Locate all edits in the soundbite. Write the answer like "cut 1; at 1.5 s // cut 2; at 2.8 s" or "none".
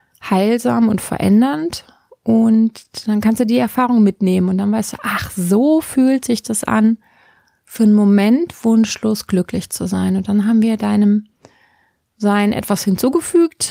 none